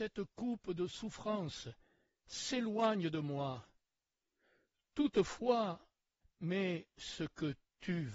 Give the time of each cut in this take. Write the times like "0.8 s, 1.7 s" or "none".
6.2 s